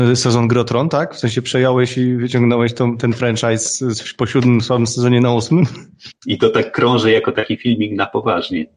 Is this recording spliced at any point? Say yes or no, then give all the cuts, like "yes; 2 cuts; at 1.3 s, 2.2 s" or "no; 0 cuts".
yes; 1 cut; at 6.1 s